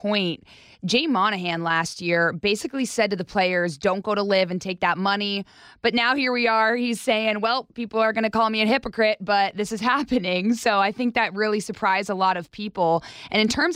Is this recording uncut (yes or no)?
yes